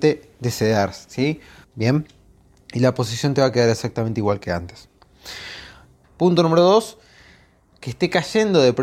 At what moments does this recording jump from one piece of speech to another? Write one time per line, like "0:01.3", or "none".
0:01.6
0:06.0